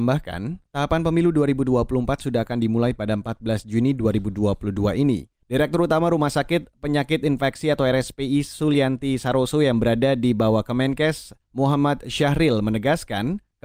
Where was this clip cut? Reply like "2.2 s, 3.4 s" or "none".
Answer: 5.4 s

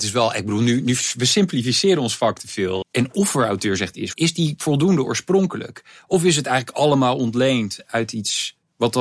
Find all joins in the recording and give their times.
2.8 s, 4.1 s

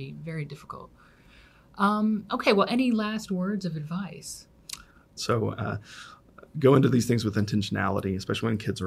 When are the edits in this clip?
5.2 s

